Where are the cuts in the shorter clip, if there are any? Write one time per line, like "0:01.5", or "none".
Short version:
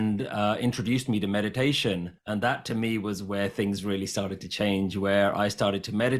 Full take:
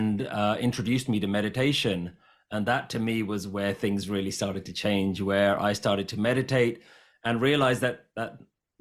0:02.2